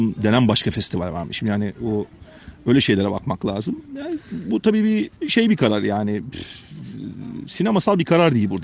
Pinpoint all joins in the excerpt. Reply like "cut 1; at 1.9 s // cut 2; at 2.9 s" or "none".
cut 1; at 5.2 s